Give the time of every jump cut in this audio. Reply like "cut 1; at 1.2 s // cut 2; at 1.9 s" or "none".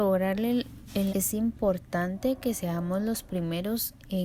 cut 1; at 1.1 s